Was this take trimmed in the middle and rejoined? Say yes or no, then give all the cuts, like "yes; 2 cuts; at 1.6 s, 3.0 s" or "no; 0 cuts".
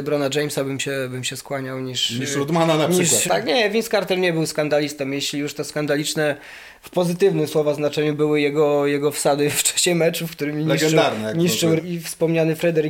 yes; 2 cuts; at 3.3 s, 11.8 s